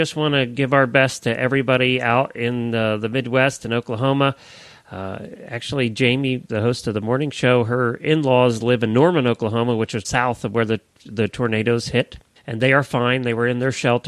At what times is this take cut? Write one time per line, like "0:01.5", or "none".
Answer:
0:10.0
0:12.4